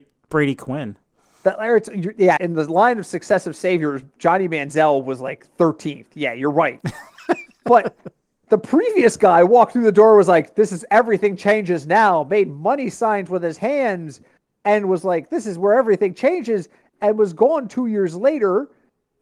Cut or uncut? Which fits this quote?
cut